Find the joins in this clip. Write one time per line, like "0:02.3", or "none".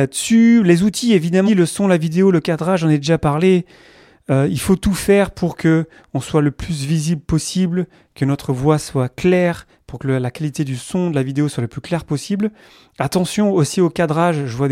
0:01.5